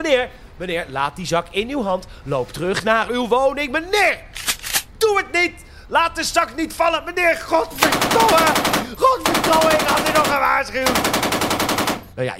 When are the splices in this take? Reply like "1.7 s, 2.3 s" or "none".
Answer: none